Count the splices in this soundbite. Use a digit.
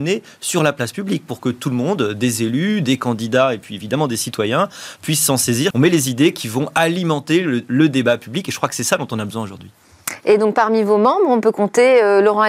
1